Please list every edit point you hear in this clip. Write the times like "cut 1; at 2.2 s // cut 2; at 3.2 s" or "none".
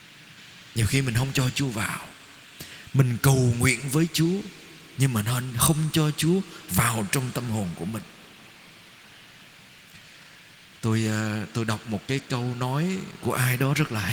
none